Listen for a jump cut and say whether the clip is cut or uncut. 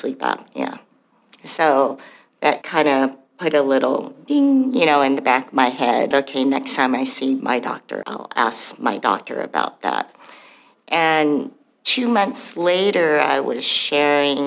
cut